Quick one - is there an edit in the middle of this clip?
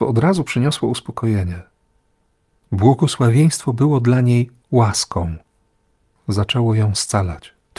no; 0 cuts

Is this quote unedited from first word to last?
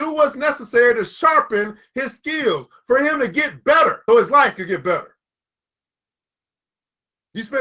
no; 1 cut; at 4.1 s

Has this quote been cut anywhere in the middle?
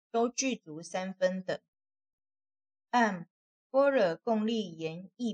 no; 0 cuts

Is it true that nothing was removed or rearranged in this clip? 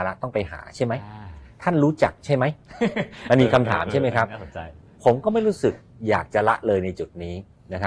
yes; 0 cuts

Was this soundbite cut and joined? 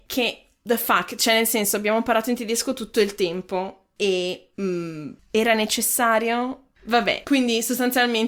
yes; 2 cuts; at 4.5 s, 7.2 s

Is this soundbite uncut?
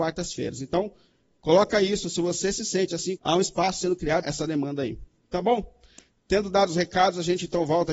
no; 2 cuts; at 3.2 s, 4.2 s

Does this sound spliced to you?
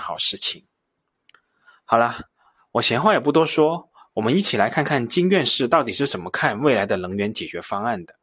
no; 0 cuts

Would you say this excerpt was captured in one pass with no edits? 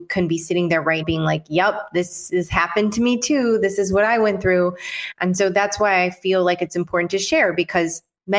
no; 1 cut; at 1.0 s

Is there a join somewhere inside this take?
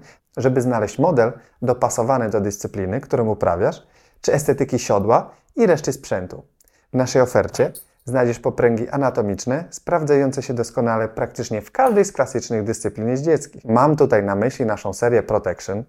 no; 0 cuts

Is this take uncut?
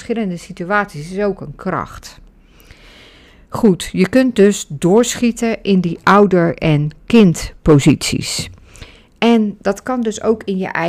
yes; 0 cuts

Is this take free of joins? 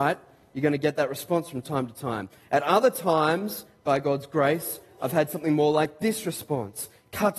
yes; 0 cuts

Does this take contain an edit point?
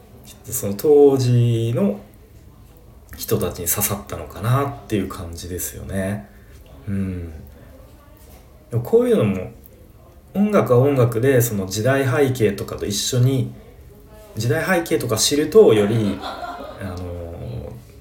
no; 0 cuts

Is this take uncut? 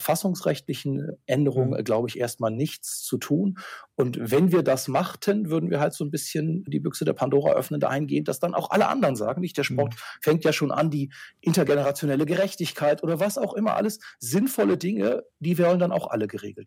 yes; 0 cuts

